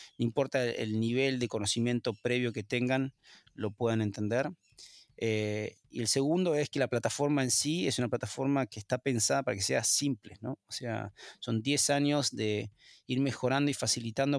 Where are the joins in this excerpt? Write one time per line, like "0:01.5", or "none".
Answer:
none